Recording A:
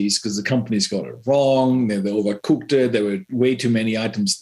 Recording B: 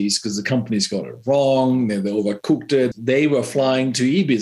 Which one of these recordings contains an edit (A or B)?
B